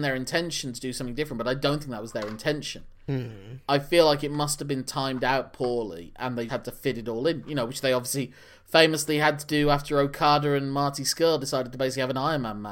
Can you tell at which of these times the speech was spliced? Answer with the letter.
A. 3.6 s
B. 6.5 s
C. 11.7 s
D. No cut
B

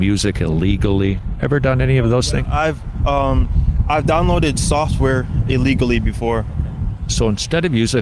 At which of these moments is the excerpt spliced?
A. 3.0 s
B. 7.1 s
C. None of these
B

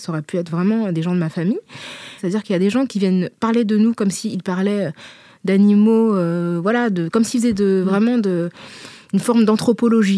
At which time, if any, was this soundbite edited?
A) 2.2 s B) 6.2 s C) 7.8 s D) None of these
A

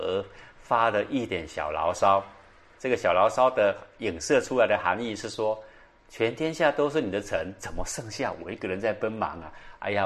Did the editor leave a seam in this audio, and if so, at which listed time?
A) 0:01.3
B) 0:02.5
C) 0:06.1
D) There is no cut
A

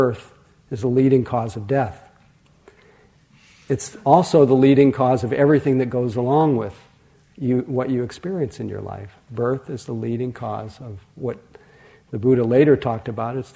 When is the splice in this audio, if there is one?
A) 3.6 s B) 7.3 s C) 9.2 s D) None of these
D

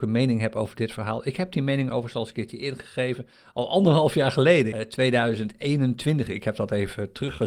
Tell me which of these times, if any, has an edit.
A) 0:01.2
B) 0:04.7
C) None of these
B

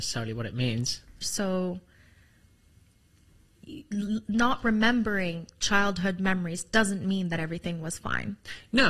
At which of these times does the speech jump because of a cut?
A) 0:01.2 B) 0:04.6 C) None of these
A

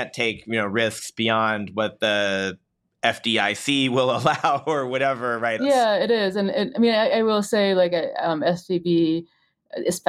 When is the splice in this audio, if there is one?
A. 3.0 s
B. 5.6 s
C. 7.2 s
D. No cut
B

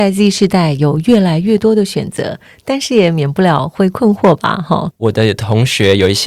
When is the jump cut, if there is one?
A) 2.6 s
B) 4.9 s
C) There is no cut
B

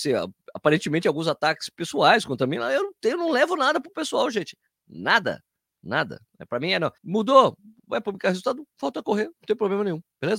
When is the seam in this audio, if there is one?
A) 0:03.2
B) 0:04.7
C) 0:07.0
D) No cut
C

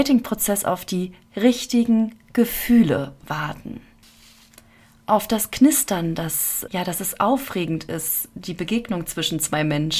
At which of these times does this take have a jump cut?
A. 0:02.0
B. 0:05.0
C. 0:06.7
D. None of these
C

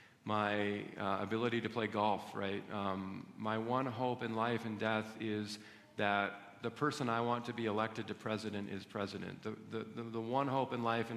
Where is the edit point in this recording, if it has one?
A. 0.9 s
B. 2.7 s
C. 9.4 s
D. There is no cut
D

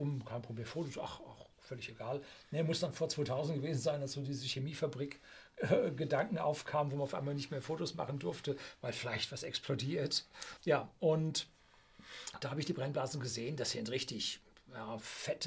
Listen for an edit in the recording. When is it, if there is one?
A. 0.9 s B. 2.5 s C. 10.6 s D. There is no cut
C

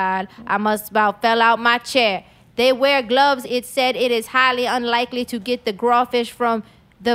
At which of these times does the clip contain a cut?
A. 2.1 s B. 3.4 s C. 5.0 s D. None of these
B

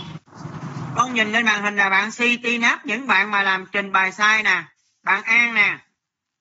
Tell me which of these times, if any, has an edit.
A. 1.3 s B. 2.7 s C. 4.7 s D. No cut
D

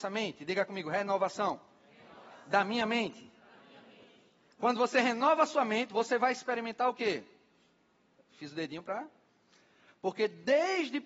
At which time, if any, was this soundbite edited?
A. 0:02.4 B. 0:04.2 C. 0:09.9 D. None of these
C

